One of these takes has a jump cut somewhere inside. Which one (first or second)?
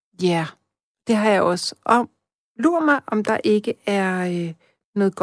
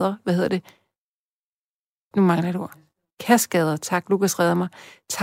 second